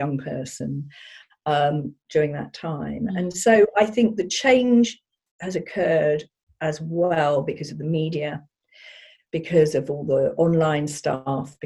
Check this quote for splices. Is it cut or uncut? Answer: uncut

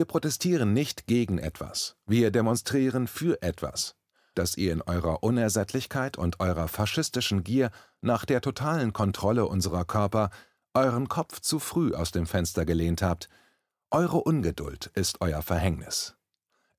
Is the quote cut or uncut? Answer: cut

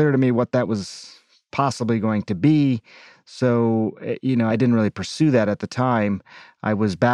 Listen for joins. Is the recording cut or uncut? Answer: cut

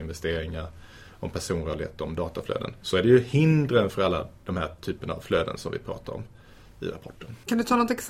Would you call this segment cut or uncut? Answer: uncut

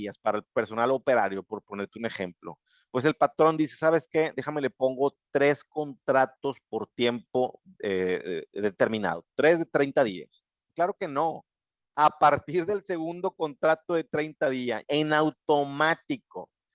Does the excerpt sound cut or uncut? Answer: cut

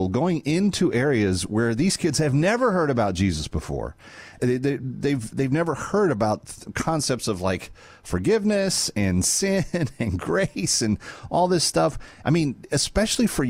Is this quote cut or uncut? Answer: cut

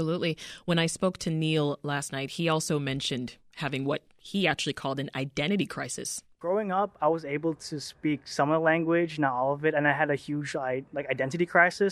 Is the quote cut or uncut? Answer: cut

